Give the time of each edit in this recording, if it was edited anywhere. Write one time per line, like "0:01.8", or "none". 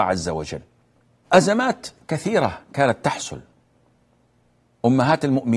0:01.2